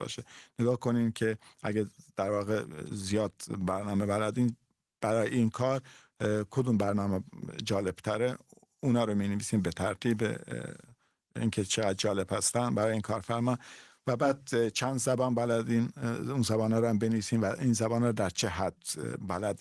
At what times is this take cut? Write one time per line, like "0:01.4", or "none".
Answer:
none